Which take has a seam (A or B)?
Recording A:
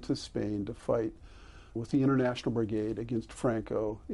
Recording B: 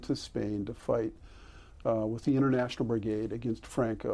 A